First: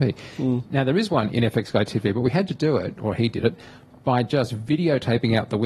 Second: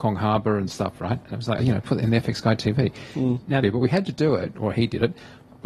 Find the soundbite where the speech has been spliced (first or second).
second